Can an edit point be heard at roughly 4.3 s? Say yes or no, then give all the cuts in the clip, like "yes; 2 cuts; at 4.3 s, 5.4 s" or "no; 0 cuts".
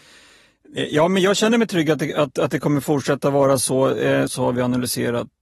yes; 1 cut; at 4.3 s